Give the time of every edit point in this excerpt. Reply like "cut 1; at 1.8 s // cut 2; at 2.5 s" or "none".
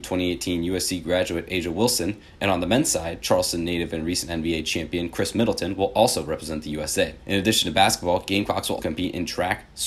cut 1; at 7.2 s // cut 2; at 8.8 s